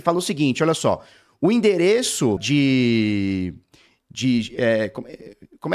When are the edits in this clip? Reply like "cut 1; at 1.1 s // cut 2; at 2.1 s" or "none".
cut 1; at 2.4 s